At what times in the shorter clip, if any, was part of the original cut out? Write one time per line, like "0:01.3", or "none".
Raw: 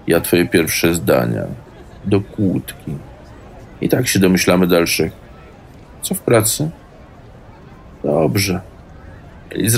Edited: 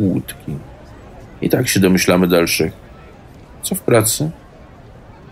none